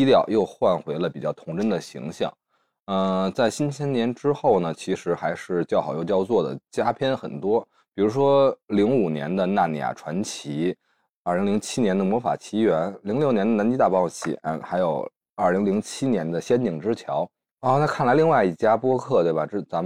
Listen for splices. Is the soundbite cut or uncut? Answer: uncut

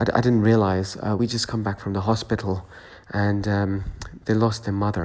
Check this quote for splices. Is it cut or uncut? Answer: uncut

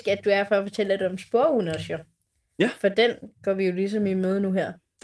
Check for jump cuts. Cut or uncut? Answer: uncut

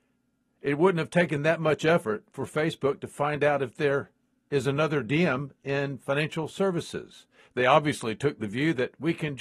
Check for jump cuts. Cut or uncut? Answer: uncut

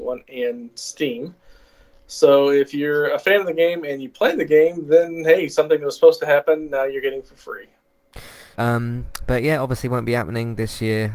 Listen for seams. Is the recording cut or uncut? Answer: cut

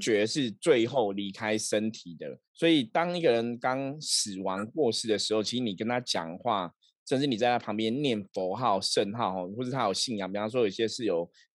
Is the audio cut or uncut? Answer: cut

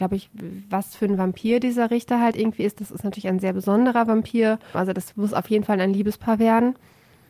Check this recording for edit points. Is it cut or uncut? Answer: cut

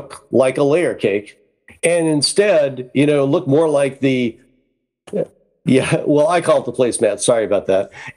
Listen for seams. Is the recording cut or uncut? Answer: uncut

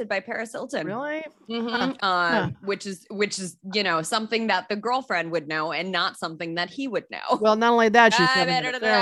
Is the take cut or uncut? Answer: cut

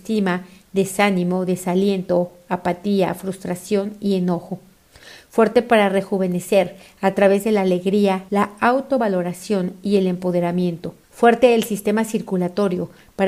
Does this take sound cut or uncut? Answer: cut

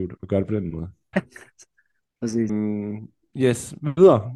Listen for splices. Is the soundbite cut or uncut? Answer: cut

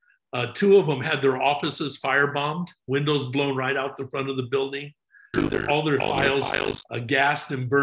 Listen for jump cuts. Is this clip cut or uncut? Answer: cut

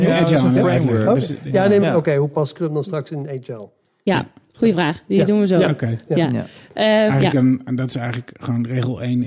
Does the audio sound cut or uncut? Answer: cut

